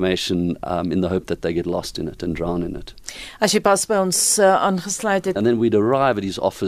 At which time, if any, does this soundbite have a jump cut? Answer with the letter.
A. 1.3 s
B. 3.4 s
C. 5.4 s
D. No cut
C